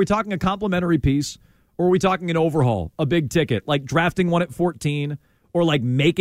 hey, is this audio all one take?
yes; 0 cuts

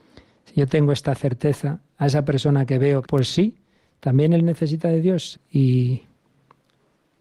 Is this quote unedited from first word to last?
no; 2 cuts; at 3.0 s, 5.3 s

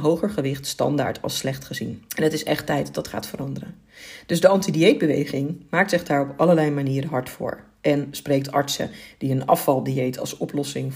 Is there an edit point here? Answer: yes; 1 cut; at 2.1 s

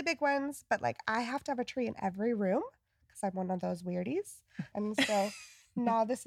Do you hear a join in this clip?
yes; 1 cut; at 4.7 s

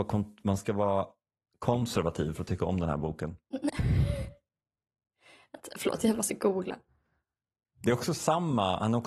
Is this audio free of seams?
yes; 0 cuts

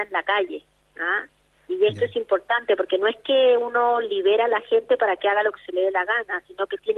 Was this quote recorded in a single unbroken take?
yes; 0 cuts

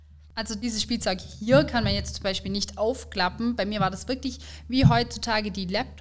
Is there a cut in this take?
no; 0 cuts

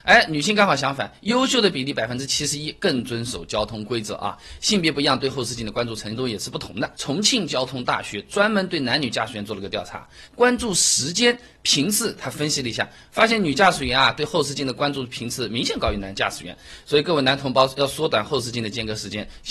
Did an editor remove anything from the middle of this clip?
yes; 2 cuts; at 6.9 s, 10.2 s

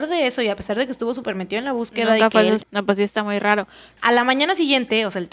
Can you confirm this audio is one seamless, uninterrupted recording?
no; 1 cut; at 2.6 s

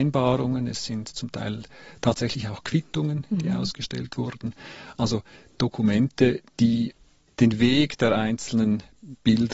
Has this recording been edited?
no; 0 cuts

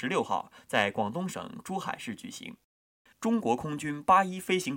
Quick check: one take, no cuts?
no; 1 cut; at 3.1 s

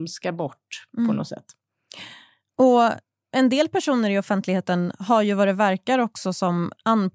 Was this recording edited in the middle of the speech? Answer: no; 0 cuts

